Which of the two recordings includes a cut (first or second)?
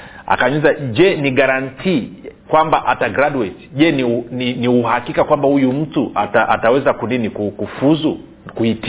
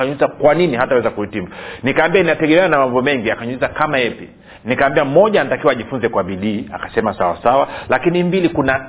first